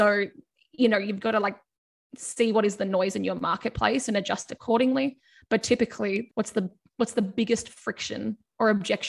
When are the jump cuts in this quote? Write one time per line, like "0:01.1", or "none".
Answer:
0:06.3

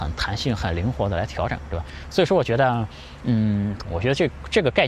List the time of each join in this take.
0:03.9

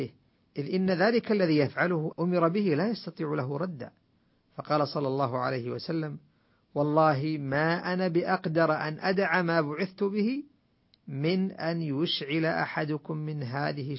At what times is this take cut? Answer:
0:02.1

